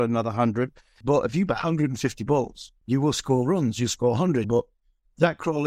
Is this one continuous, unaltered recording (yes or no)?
no